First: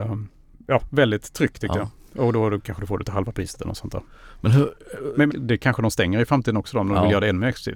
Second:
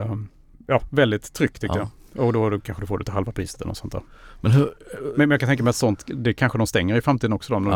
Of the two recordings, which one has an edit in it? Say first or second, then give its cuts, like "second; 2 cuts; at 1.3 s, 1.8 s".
first; 1 cut; at 5.3 s